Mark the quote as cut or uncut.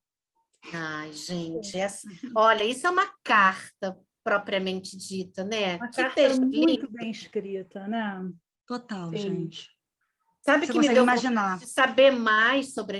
uncut